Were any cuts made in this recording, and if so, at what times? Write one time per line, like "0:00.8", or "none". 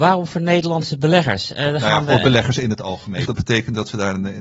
0:03.2